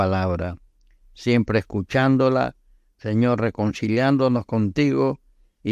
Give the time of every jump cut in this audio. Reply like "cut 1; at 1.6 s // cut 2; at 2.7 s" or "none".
none